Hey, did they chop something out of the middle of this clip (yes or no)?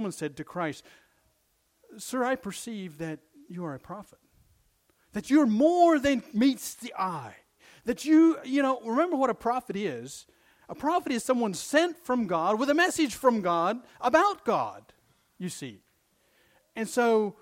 no